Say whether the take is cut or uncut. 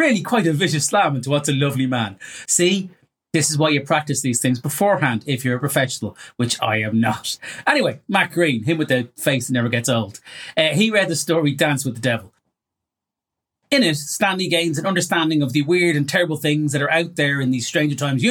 cut